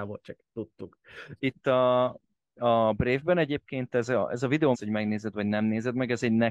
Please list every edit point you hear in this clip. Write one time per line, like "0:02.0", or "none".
0:01.4
0:04.7

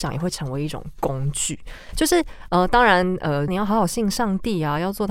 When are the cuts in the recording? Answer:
0:03.5

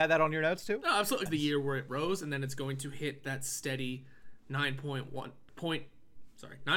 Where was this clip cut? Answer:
0:01.3
0:05.5

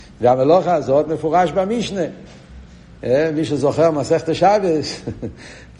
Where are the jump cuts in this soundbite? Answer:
none

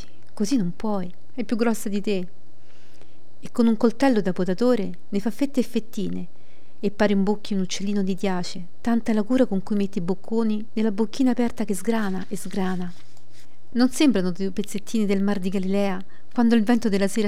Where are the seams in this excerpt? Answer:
0:13.7

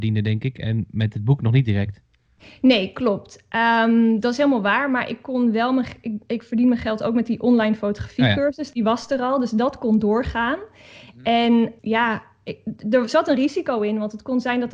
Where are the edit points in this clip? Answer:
0:11.8

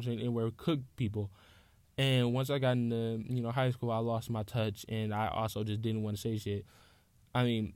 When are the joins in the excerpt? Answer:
none

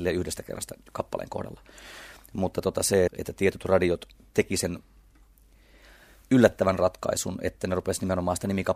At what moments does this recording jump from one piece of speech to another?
0:03.1

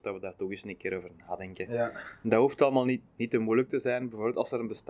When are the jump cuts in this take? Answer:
none

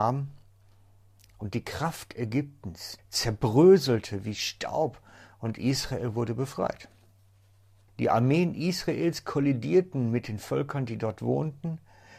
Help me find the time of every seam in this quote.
0:03.0
0:07.9

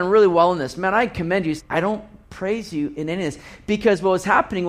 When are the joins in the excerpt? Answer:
0:01.6

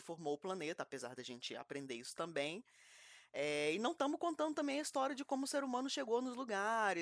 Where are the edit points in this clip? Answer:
none

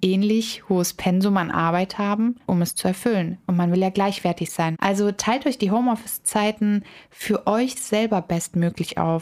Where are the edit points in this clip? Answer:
0:02.5
0:04.7

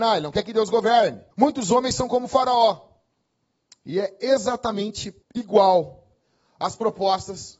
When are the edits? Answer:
0:01.3
0:03.7
0:05.2

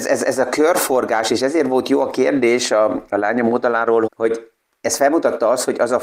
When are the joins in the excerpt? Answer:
0:04.1

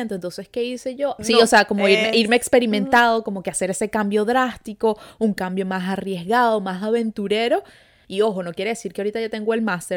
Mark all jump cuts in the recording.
0:01.2
0:08.0

